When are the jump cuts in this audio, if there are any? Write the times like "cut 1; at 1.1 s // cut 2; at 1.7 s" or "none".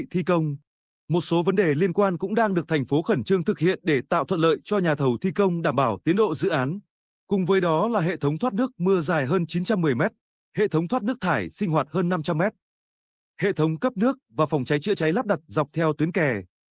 cut 1; at 7.2 s